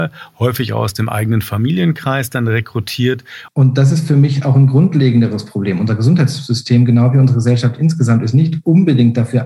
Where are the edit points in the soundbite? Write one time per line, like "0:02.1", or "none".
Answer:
0:03.5